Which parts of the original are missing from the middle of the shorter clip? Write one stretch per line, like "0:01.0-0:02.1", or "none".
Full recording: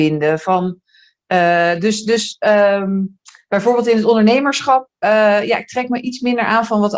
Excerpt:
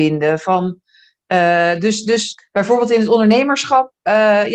0:02.4-0:03.3